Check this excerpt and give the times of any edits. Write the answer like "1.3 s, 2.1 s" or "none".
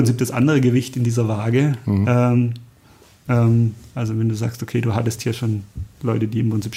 3.3 s